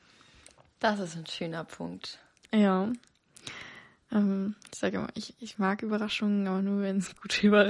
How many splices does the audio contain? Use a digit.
0